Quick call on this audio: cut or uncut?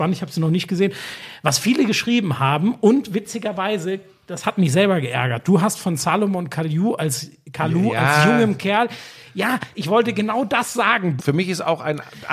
cut